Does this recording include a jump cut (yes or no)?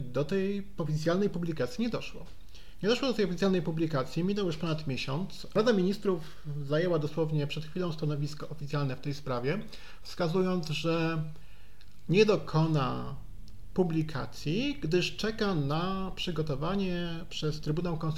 no